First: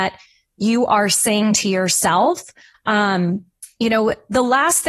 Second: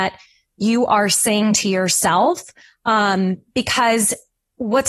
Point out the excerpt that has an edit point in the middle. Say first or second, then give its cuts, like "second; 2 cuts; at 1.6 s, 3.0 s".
first; 1 cut; at 2.7 s